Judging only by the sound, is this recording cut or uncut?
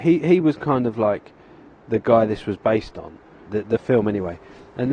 cut